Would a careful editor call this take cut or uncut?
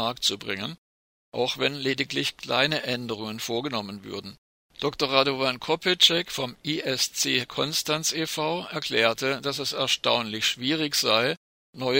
cut